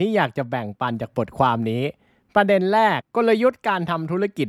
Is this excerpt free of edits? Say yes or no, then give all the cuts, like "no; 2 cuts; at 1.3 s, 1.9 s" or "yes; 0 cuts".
no; 1 cut; at 3.0 s